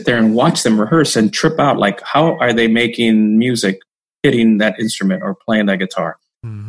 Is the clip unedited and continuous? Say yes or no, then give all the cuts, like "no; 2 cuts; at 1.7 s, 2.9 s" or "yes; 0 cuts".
yes; 0 cuts